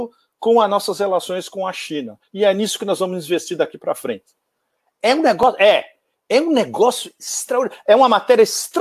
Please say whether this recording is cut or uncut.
uncut